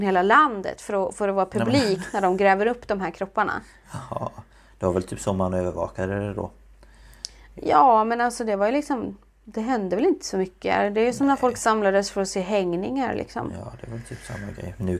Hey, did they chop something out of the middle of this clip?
no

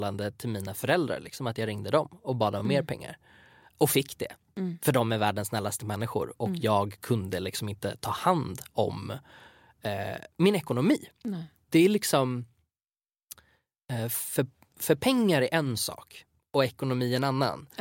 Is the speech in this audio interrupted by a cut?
no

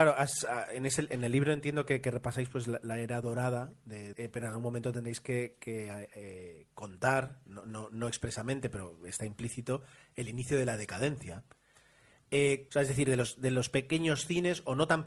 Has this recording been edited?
yes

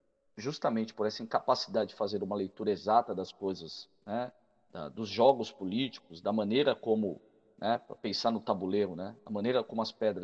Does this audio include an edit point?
no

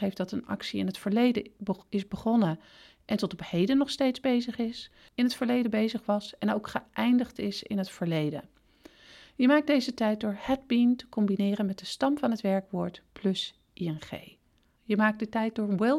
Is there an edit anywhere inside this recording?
yes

